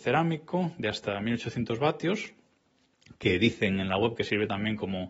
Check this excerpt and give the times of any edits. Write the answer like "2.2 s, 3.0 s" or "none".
none